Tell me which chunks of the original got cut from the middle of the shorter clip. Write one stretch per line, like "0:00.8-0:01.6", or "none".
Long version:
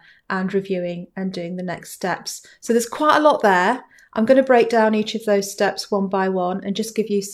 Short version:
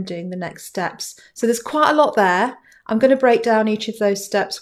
none

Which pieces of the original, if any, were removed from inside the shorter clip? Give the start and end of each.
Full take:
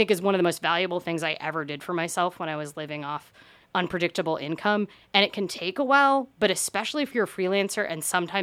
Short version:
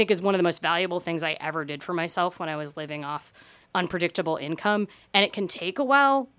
none

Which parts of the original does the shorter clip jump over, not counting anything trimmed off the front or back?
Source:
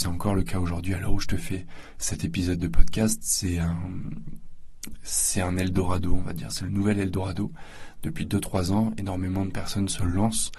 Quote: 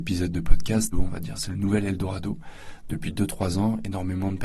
0:03.2-0:06.1

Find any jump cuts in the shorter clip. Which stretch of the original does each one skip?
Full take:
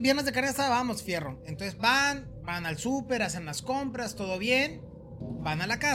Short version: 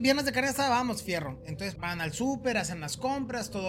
0:01.8-0:02.4

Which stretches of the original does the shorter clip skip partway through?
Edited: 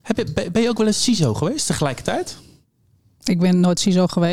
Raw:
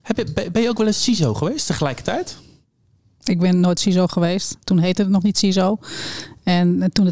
none

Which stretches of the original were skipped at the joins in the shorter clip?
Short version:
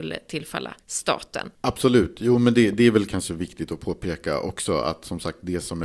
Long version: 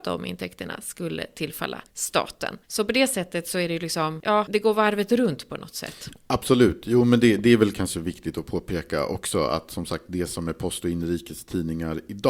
0:02.6-0:06.2

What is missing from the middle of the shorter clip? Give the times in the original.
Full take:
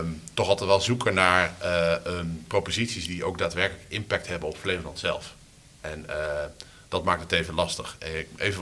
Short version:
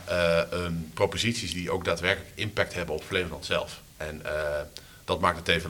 0:05.4-0:05.7

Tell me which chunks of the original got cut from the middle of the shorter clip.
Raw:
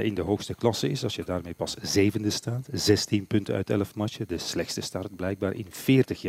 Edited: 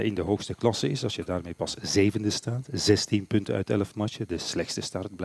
none

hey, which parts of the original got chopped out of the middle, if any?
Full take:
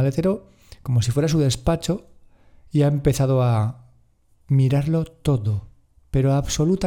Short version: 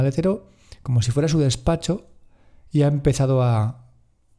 none

